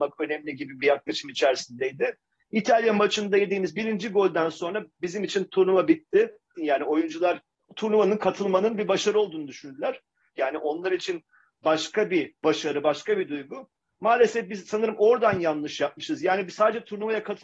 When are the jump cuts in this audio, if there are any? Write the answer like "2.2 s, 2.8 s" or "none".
6.6 s, 10.4 s